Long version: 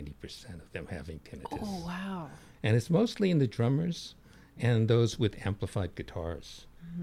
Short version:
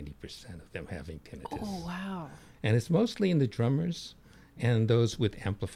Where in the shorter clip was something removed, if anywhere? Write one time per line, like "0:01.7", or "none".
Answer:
none